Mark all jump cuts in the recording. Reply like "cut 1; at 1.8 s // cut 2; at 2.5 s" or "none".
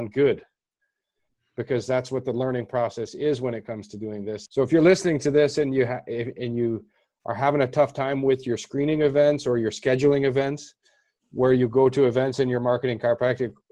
cut 1; at 4.5 s